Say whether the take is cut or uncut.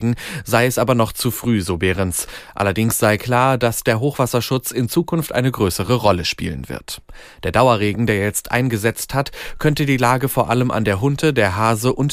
uncut